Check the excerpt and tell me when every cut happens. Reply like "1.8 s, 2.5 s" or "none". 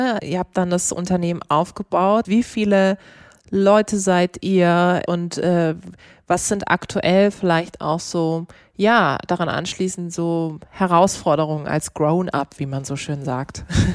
2.2 s